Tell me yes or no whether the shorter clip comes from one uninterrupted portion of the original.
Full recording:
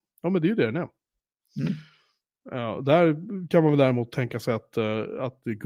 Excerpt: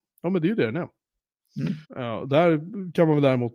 no